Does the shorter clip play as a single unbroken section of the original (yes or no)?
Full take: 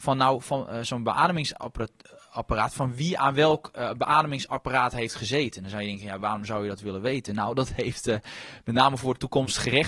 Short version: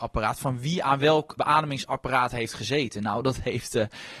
no